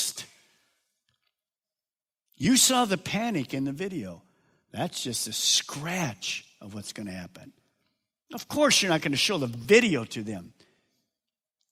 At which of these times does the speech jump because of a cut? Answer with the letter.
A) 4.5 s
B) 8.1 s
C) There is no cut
C